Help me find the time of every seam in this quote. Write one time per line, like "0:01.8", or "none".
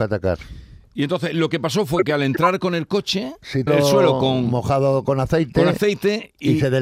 0:03.7